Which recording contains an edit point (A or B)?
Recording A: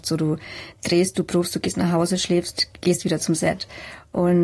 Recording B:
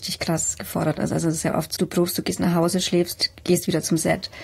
B